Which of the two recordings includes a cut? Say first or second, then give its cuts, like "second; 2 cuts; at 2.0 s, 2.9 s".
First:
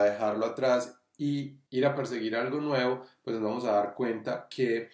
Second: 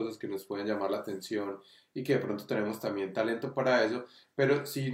first; 1 cut; at 1.7 s